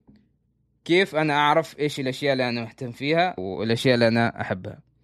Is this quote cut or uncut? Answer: cut